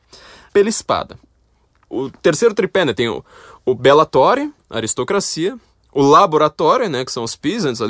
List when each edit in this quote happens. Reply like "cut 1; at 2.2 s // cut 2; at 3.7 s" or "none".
none